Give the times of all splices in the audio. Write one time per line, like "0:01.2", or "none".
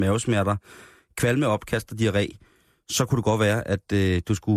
none

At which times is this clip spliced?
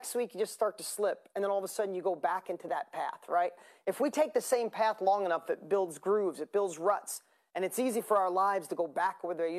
none

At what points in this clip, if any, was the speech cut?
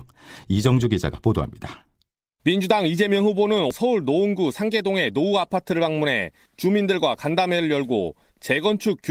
none

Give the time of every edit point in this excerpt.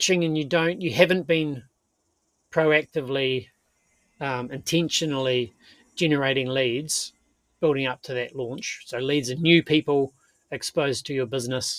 none

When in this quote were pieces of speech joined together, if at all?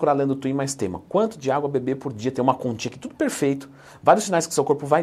none

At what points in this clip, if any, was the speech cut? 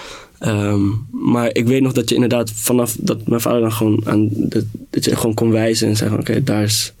none

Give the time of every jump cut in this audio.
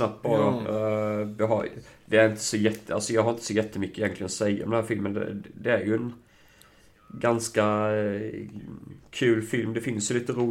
none

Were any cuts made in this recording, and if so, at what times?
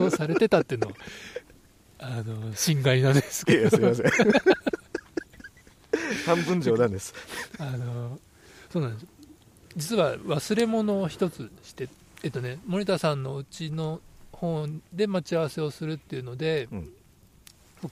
none

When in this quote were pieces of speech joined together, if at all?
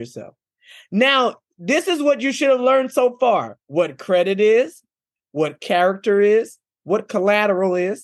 0:03.6

